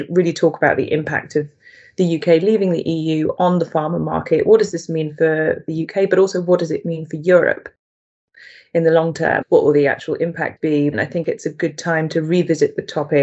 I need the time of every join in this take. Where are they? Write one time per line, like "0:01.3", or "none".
0:09.4
0:10.9